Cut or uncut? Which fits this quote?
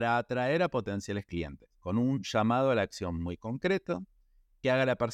uncut